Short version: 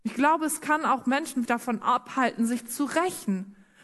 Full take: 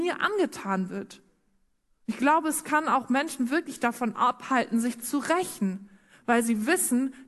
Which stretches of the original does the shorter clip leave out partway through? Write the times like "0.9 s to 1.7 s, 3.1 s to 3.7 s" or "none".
3.5 s to 3.8 s